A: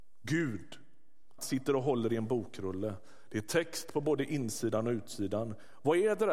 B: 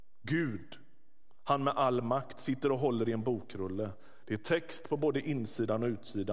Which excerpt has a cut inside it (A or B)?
A